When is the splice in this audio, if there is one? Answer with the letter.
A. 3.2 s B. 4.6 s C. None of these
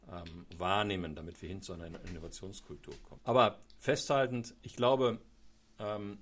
A